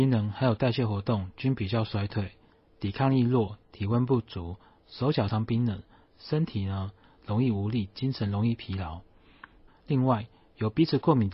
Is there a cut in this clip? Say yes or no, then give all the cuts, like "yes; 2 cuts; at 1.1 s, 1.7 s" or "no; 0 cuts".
yes; 2 cuts; at 5.3 s, 9.7 s